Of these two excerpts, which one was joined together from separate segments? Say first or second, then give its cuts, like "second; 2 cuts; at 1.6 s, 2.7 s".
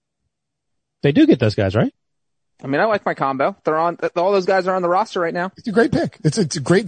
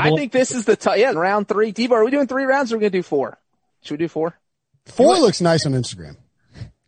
second; 2 cuts; at 1.1 s, 4.7 s